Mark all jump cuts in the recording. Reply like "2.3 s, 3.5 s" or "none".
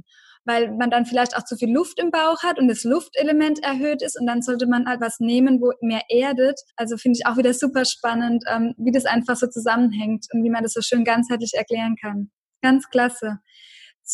5.0 s, 6.7 s